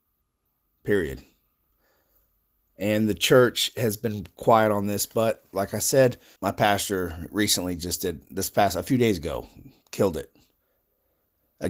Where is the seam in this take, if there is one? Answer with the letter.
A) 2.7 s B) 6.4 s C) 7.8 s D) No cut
B